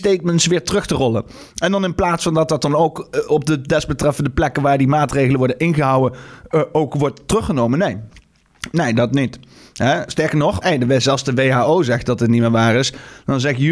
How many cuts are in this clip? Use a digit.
1